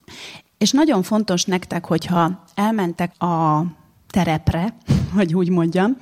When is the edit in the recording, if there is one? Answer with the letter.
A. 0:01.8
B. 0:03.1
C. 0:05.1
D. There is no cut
B